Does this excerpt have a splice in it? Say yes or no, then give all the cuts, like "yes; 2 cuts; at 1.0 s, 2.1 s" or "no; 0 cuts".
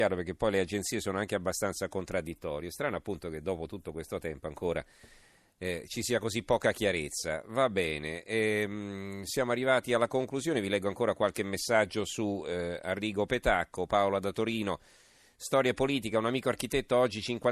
no; 0 cuts